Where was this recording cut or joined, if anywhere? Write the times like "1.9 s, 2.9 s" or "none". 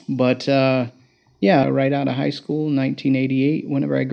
1.6 s